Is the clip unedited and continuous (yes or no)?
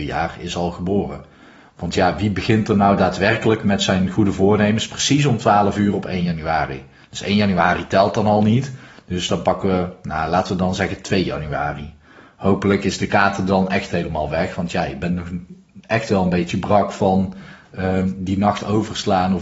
yes